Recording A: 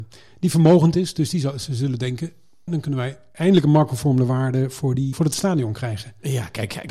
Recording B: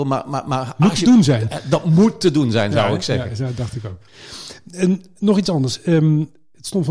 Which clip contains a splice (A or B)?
A